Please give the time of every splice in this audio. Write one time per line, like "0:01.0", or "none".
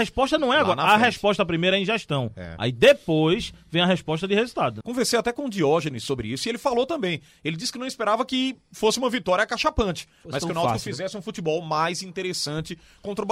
0:04.8